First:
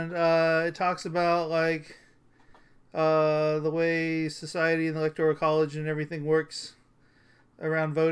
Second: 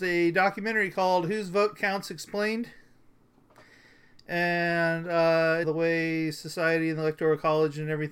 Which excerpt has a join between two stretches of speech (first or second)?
second